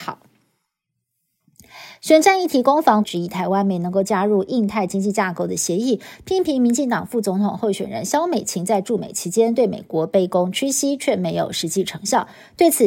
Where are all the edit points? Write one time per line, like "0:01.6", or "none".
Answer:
0:03.0